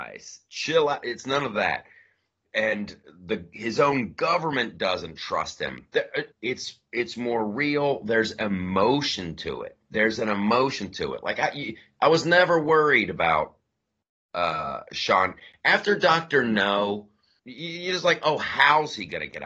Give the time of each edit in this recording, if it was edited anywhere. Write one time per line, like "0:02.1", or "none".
0:06.3
0:17.4

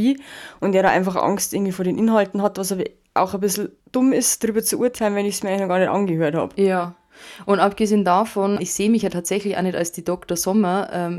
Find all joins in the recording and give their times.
0:03.8
0:08.6

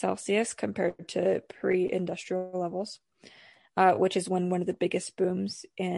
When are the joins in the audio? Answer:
none

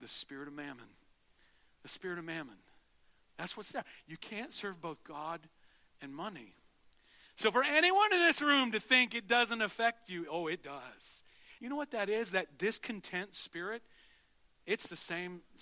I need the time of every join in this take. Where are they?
0:11.6

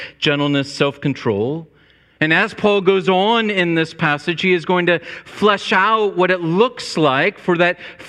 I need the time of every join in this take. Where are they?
none

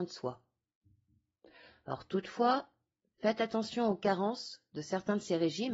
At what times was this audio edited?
none

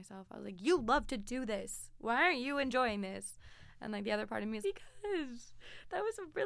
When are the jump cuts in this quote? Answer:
0:04.6

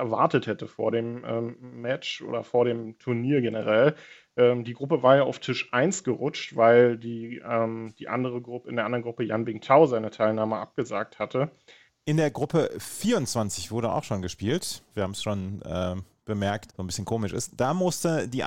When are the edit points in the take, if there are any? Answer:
0:11.9
0:14.9
0:16.7

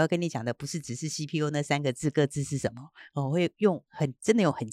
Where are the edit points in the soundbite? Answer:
none

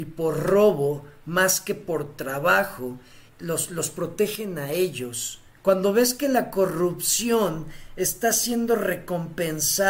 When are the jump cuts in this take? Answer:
0:03.3
0:05.6

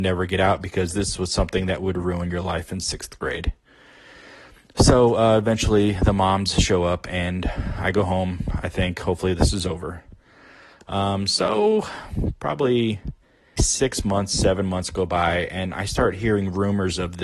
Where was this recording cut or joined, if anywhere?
0:13.6

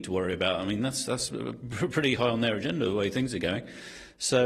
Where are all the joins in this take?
none

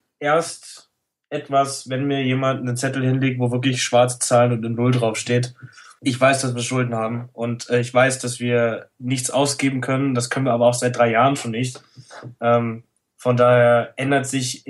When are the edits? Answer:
0:06.0

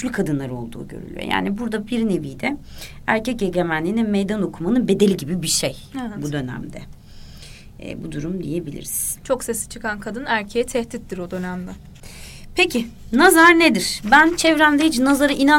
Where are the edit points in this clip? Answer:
none

